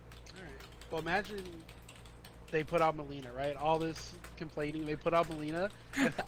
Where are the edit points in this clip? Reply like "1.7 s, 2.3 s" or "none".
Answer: none